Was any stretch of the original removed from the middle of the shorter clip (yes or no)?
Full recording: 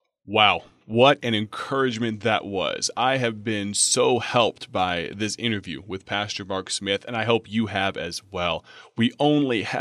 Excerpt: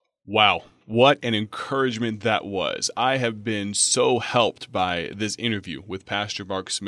no